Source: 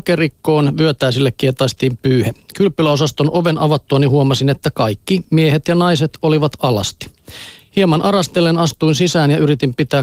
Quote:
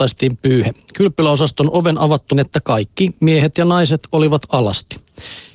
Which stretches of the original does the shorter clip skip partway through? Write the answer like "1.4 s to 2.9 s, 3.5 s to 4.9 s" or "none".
3.9 s to 4.4 s